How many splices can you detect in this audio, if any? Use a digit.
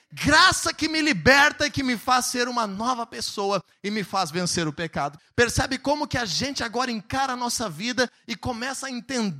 1